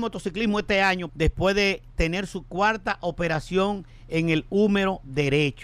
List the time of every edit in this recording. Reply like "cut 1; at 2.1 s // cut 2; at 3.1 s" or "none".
cut 1; at 1.1 s